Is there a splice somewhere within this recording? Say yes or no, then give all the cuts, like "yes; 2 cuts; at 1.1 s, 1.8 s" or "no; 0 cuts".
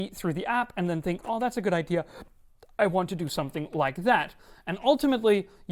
no; 0 cuts